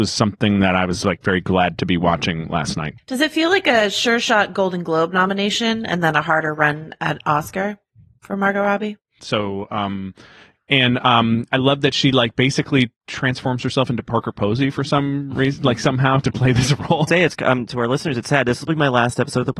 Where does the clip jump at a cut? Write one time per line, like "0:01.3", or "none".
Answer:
0:09.2
0:17.1